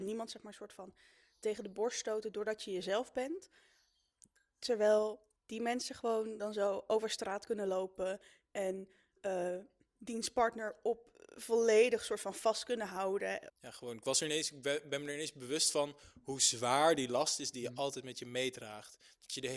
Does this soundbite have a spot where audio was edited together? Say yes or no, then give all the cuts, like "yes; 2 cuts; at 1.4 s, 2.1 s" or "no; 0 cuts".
yes; 2 cuts; at 5.4 s, 13.5 s